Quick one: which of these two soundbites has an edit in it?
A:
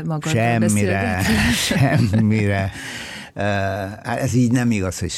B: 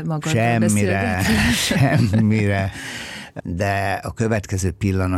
B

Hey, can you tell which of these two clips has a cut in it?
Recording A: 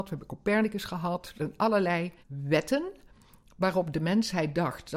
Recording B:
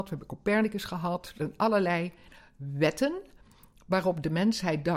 A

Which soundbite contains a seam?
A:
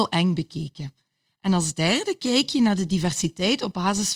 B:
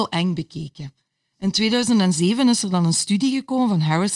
A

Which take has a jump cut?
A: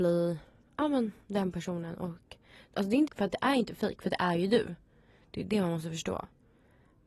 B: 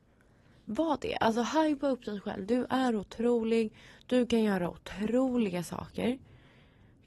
A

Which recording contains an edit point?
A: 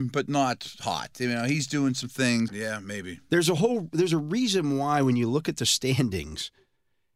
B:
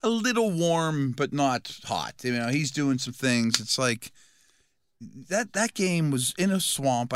A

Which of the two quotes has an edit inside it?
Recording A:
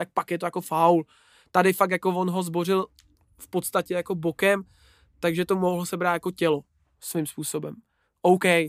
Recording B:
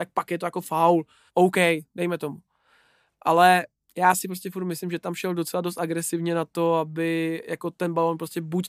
B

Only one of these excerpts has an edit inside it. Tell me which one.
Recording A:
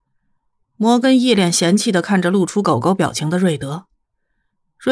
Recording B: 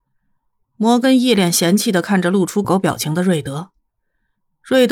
B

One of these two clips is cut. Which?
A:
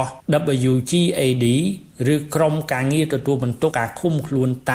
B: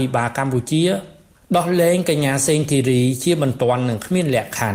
A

